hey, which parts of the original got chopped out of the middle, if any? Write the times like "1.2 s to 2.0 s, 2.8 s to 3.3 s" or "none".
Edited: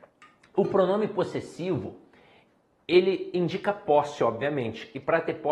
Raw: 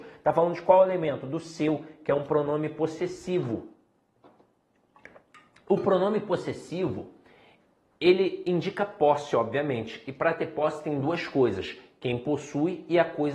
none